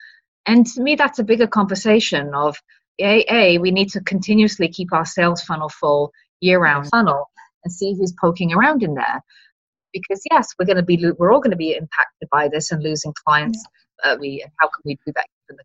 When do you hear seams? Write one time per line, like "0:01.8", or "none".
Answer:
0:06.9
0:14.2